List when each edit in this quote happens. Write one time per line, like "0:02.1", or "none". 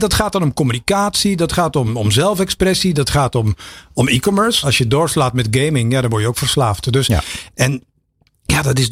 0:04.6
0:07.5